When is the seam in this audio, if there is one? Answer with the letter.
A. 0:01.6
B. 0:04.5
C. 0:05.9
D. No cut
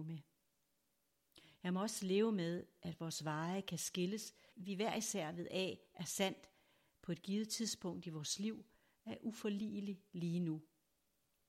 B